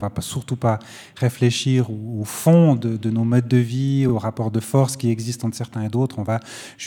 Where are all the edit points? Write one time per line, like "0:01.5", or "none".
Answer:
none